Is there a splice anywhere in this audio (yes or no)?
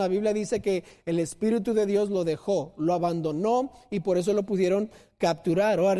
no